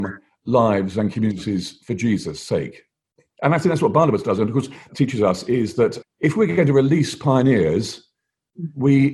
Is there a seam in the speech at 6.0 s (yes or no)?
yes